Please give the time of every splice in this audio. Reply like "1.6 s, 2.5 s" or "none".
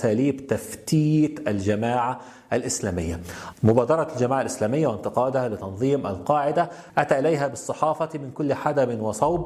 3.5 s